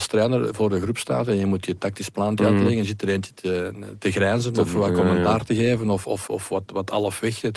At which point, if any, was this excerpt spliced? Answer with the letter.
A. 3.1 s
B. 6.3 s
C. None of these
B